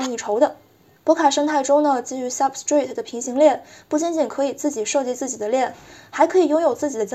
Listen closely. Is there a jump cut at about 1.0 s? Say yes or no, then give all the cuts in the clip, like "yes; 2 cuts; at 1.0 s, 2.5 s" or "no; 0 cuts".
yes; 1 cut; at 1.0 s